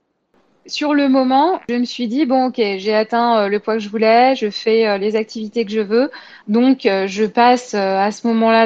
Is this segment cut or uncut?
cut